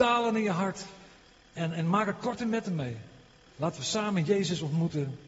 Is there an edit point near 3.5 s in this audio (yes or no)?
yes